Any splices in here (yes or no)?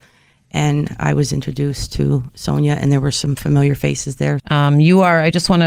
yes